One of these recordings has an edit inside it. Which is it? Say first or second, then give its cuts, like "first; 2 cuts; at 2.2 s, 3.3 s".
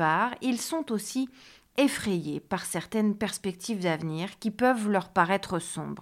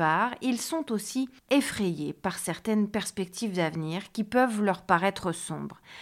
second; 1 cut; at 1.4 s